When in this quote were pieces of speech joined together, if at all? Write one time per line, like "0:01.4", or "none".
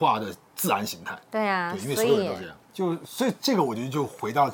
0:02.6

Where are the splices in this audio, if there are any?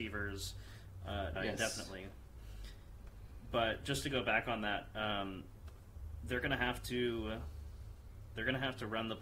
0:01.4

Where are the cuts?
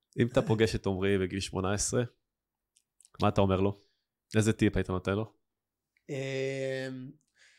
none

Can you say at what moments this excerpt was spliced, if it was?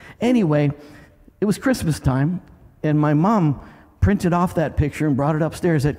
none

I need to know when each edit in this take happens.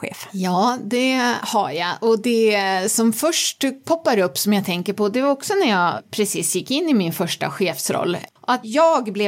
0:08.3

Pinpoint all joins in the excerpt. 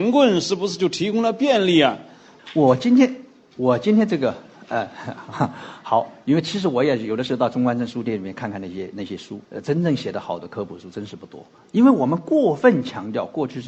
0:02.4
0:09.4
0:11.6

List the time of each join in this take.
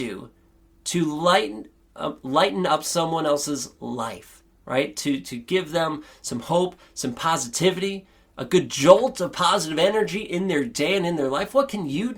none

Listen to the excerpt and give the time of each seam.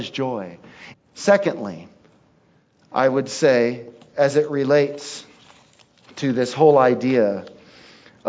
0:00.9

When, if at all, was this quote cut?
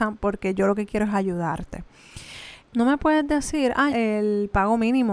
0:02.6
0:03.9

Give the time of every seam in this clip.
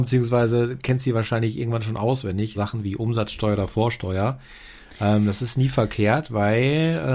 0:02.5

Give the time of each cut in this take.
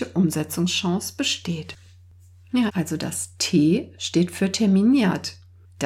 0:02.7

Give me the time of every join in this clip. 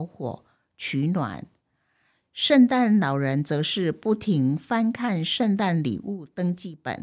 none

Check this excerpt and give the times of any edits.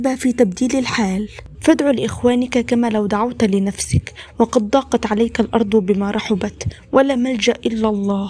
0:01.6

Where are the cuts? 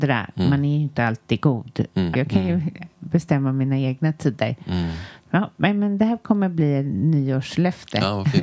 0:02.1

